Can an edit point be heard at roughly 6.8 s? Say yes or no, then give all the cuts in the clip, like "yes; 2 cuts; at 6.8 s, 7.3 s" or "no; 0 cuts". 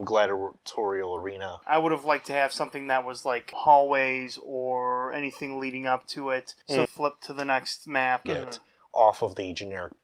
yes; 2 cuts; at 6.8 s, 8.2 s